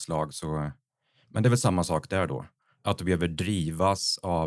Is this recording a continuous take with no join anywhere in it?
yes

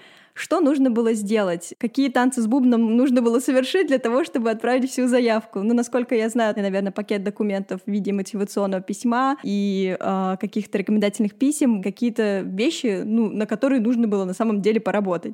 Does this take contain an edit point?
yes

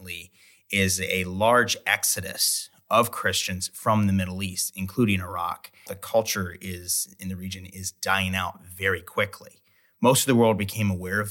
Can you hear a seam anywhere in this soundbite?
yes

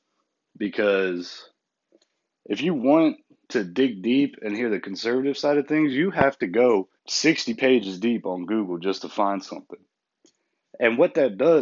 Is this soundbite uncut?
no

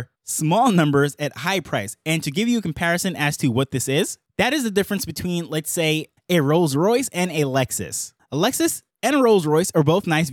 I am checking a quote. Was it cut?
no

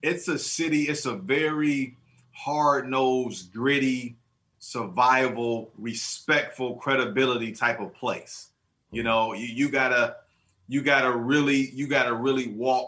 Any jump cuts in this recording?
no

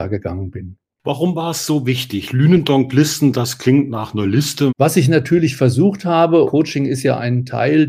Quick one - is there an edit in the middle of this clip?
yes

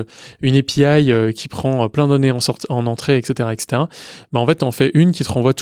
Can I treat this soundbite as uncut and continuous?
yes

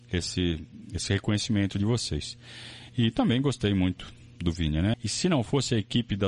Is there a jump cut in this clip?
yes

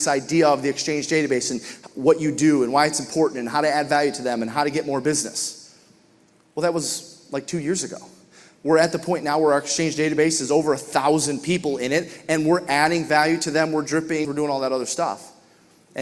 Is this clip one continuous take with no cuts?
no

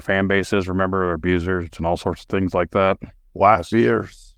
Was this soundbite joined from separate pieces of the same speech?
yes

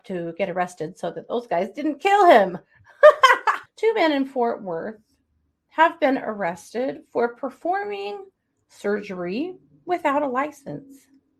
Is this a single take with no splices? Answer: no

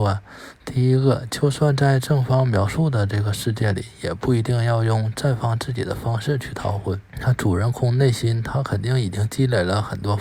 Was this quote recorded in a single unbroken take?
no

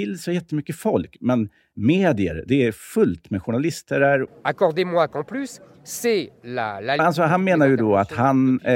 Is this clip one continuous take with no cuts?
no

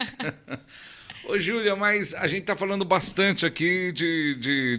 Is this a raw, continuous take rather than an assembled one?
yes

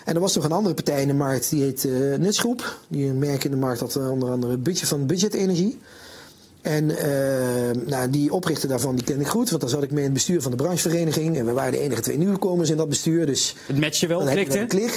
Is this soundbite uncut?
yes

